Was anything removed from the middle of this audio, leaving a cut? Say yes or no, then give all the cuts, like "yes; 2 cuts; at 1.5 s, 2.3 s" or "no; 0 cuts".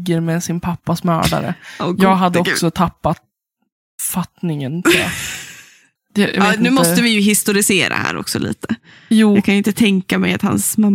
yes; 1 cut; at 6.0 s